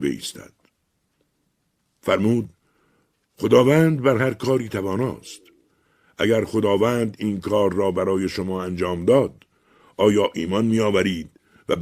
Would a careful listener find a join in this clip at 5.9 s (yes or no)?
no